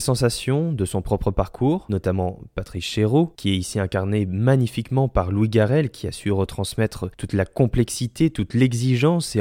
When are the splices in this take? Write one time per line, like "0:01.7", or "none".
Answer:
0:01.9